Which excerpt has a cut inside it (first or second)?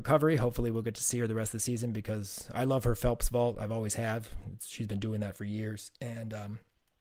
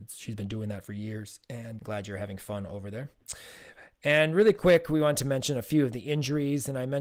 second